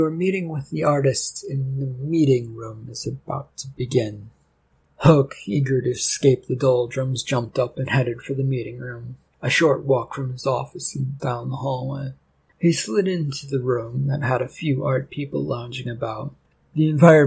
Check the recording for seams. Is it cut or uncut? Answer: cut